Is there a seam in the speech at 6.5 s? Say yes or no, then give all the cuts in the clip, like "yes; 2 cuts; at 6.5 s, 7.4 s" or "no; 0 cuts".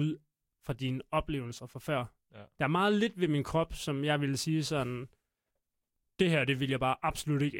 no; 1 cut; at 2.5 s